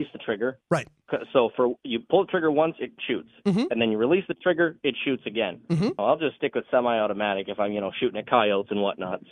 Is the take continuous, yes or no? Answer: no